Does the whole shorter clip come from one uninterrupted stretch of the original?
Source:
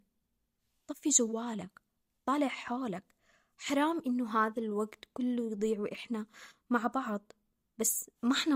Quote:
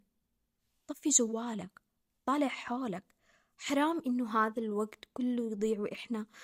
yes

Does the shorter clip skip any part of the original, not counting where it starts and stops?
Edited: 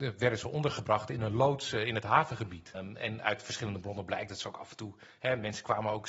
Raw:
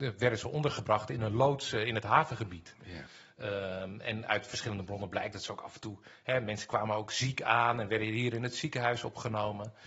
yes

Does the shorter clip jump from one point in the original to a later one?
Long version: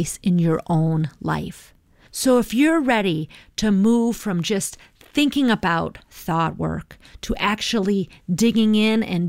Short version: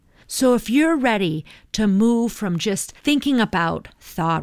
yes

